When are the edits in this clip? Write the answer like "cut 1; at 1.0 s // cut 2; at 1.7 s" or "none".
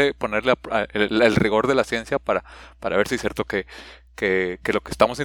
none